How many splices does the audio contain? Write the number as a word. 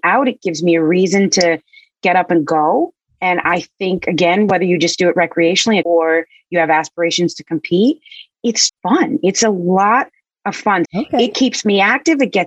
three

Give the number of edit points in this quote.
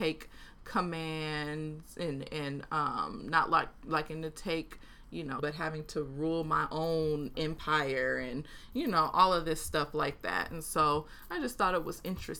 one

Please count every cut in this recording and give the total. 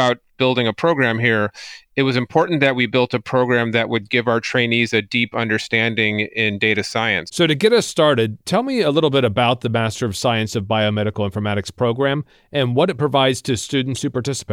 one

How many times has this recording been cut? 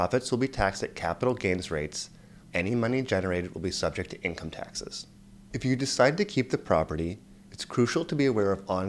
one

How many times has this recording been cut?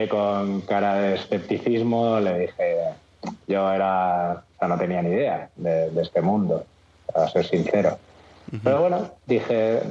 zero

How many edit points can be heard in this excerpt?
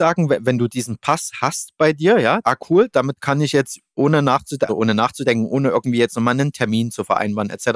two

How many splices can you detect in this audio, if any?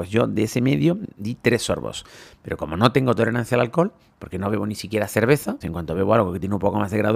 one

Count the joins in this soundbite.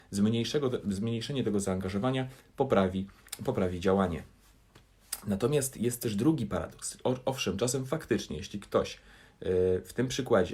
zero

